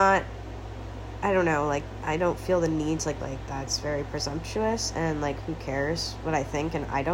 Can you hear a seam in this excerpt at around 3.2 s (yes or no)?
yes